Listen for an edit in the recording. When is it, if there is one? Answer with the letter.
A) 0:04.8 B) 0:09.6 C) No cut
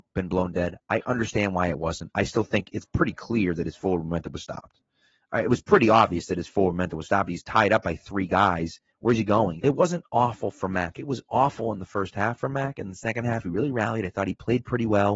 B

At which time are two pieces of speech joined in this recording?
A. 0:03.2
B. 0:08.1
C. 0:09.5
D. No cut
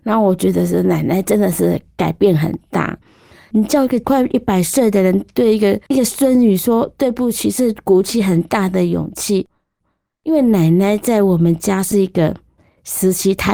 D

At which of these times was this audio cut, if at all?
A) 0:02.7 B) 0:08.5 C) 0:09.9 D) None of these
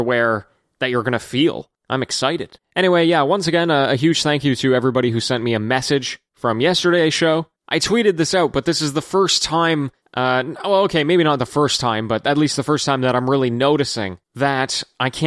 D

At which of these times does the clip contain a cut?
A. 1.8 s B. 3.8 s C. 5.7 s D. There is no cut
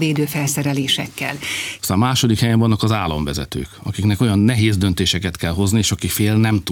A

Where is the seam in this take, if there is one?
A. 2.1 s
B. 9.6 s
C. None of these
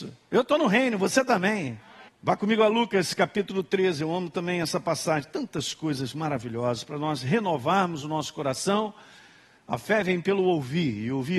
A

